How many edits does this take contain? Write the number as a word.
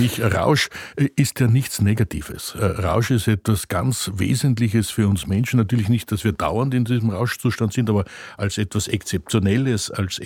zero